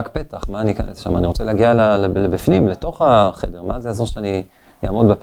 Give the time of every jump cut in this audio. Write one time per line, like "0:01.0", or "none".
none